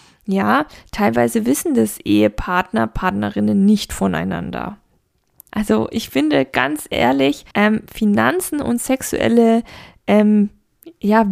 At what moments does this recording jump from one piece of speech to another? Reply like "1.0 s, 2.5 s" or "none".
5.5 s, 7.5 s